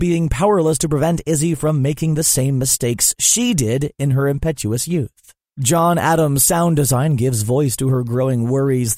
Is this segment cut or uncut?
uncut